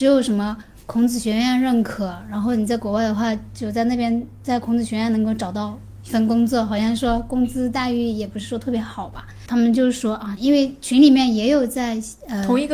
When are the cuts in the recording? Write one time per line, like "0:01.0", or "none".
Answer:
0:10.4